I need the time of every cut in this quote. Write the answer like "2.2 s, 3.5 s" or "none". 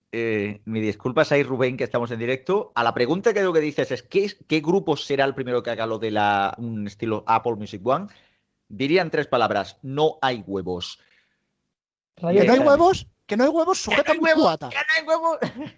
none